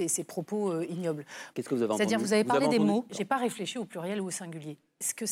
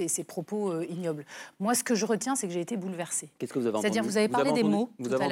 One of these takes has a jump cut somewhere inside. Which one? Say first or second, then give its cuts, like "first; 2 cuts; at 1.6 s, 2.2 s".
first; 2 cuts; at 1.5 s, 3.1 s